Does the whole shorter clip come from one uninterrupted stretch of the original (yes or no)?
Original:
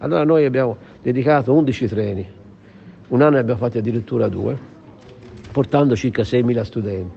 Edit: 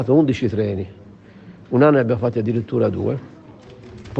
yes